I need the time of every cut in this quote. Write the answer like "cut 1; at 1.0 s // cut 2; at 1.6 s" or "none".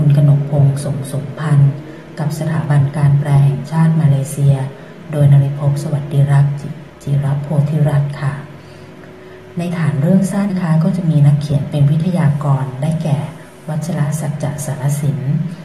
cut 1; at 6.9 s // cut 2; at 10.5 s